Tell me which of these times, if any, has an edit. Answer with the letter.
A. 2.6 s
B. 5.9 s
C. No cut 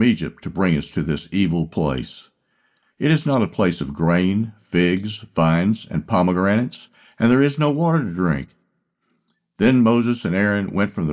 C